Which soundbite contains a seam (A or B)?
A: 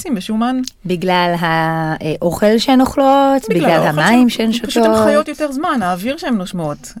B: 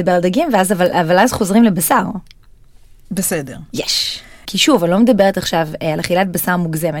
B